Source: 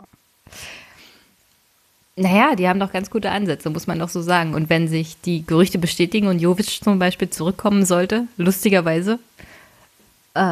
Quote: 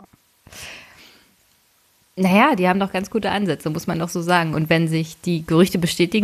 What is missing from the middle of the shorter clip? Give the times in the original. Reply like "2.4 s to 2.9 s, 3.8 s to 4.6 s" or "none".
none